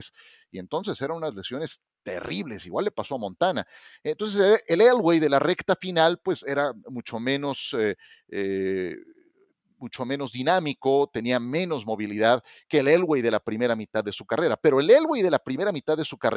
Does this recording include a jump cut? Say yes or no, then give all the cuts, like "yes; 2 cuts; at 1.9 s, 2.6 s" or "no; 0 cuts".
no; 0 cuts